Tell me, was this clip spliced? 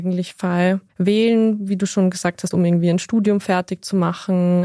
yes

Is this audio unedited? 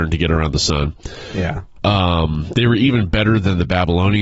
yes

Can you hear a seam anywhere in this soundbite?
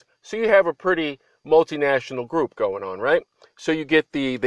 no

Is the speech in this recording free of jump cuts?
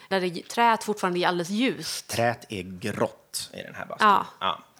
yes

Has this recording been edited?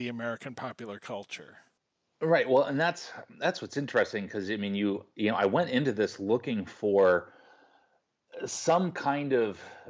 no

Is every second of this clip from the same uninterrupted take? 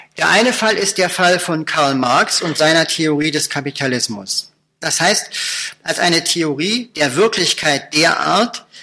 no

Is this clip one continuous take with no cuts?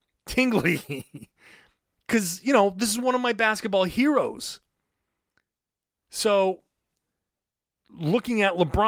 no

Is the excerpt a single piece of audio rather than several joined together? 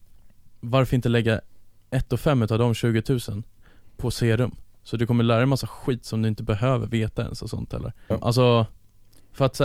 no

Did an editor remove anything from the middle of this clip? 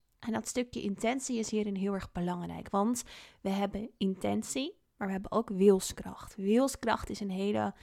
no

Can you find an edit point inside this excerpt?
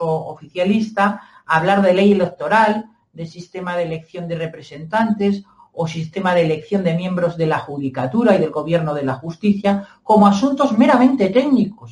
no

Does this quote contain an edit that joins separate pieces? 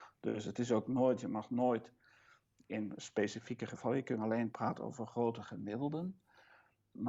no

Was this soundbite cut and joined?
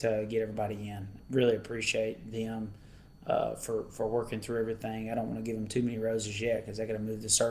yes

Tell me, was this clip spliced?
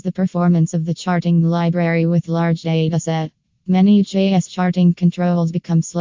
no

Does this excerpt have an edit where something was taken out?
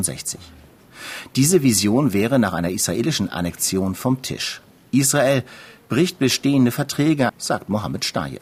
yes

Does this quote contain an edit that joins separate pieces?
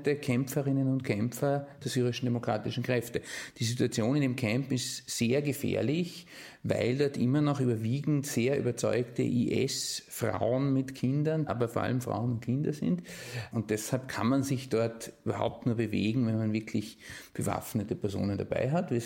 yes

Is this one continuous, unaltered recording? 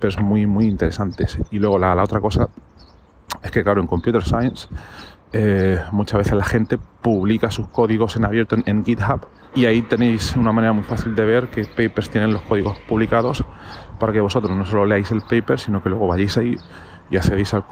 no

